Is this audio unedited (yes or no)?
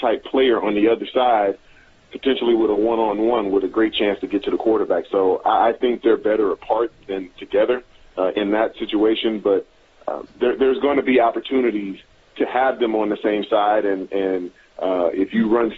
yes